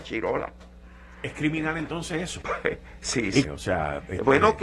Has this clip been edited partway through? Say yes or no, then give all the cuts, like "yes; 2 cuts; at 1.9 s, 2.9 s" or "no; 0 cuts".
yes; 2 cuts; at 2.4 s, 3.4 s